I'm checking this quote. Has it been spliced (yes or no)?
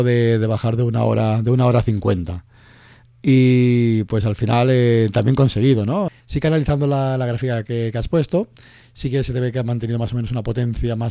yes